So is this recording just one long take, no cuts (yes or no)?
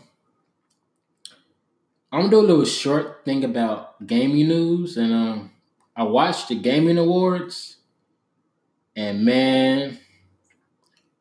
yes